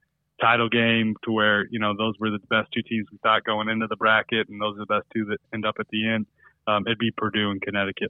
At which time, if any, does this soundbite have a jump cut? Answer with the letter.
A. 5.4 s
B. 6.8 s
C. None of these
A